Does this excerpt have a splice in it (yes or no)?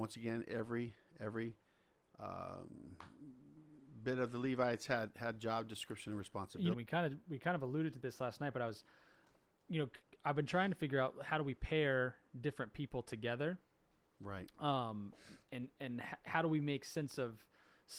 yes